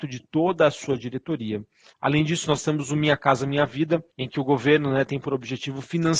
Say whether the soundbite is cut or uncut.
cut